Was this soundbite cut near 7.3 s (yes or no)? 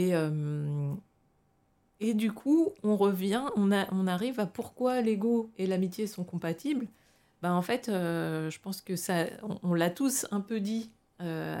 no